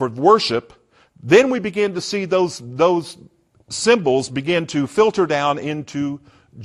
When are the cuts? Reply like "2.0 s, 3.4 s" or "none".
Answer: none